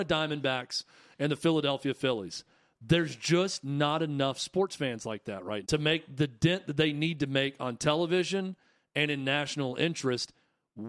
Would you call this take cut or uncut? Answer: cut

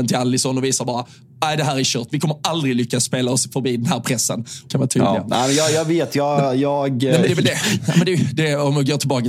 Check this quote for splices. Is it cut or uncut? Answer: cut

